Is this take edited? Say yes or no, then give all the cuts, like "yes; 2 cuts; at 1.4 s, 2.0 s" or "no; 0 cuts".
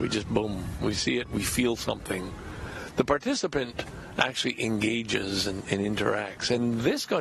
no; 0 cuts